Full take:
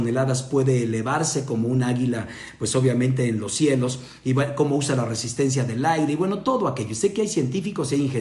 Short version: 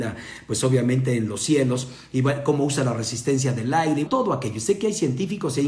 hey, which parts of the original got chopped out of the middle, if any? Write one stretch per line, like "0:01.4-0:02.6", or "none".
0:06.2-0:06.4